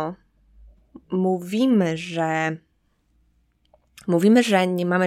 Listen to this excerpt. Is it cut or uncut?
cut